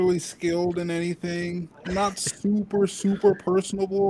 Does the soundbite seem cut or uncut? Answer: uncut